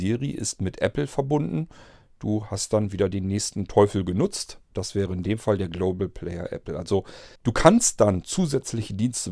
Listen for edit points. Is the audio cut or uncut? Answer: cut